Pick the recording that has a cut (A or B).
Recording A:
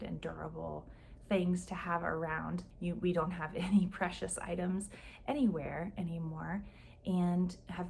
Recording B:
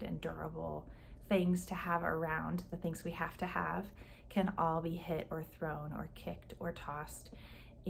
A